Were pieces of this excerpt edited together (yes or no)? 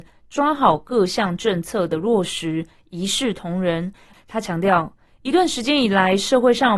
yes